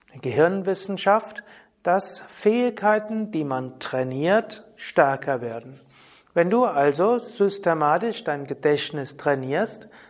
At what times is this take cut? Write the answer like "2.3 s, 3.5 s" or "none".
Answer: none

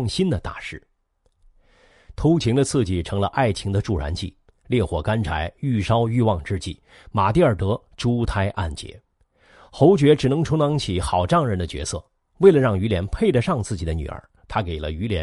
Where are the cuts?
none

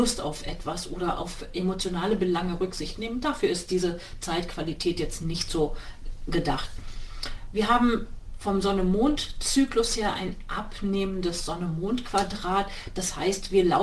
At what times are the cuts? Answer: none

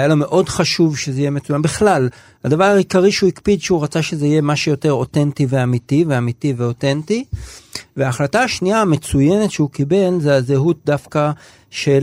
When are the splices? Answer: none

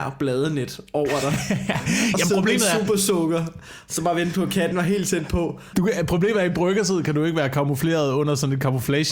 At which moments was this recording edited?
5.7 s

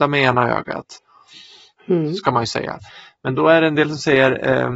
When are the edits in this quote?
1.7 s

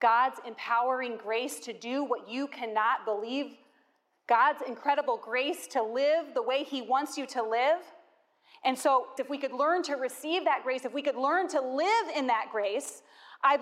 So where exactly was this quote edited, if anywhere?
9.2 s

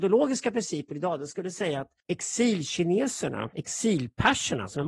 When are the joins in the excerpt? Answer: 3.5 s

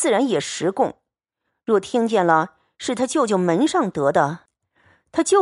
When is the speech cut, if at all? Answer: none

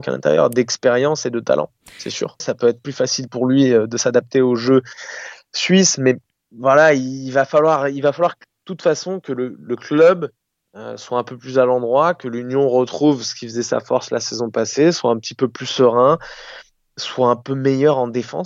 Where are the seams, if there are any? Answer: 2.4 s

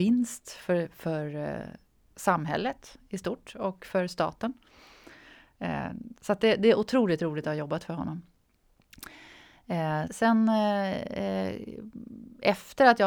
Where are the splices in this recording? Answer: 10.1 s

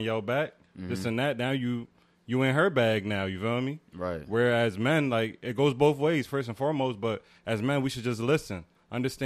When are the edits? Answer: none

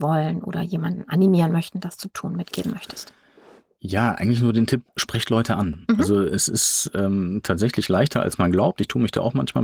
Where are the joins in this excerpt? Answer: none

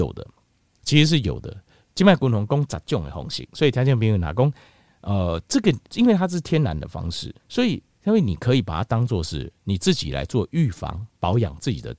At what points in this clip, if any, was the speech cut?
5.9 s, 7.4 s

